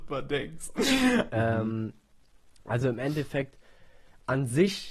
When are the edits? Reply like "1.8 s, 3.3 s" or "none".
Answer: 1.3 s